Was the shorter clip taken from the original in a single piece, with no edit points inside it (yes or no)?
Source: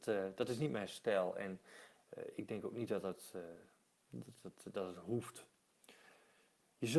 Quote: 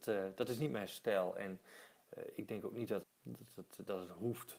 no